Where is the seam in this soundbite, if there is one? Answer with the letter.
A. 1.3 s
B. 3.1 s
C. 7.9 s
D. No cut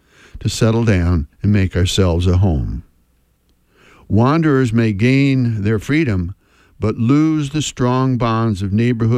A